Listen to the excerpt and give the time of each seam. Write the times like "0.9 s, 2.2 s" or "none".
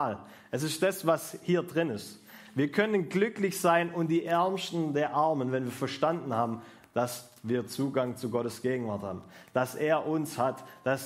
none